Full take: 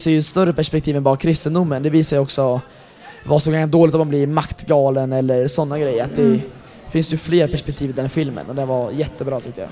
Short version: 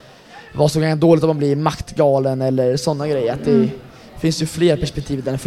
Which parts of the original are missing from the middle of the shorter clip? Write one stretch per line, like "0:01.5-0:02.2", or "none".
none